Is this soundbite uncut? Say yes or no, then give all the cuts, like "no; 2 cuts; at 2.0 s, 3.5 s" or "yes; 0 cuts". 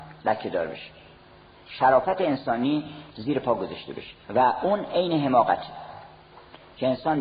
no; 1 cut; at 4.2 s